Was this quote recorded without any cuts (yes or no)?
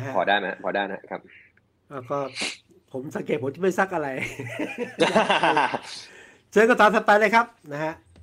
yes